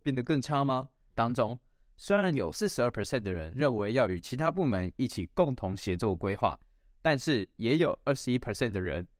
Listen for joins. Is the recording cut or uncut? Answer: cut